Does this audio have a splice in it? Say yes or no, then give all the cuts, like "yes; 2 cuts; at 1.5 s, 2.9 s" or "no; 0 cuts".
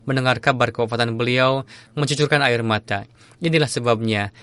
yes; 1 cut; at 1.9 s